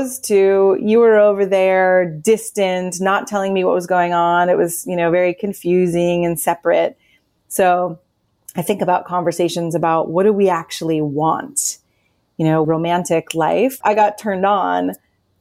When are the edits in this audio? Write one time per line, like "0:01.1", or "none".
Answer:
0:12.6
0:13.8